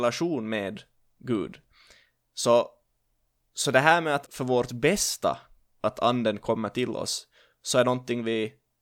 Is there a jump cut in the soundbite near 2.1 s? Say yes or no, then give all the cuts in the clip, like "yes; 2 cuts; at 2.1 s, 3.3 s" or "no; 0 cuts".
no; 1 cut; at 4.3 s